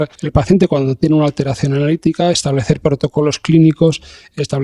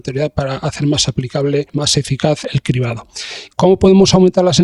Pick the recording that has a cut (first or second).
second